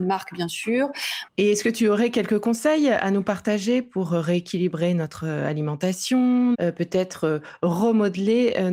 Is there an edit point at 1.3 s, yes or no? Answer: yes